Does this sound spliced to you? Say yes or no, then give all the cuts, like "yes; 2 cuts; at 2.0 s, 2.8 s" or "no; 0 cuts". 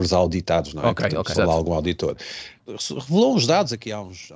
yes; 2 cuts; at 1.3 s, 2.6 s